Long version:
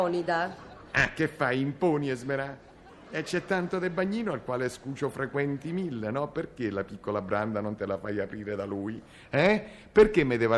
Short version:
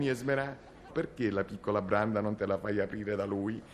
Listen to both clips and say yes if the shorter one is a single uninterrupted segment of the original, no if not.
no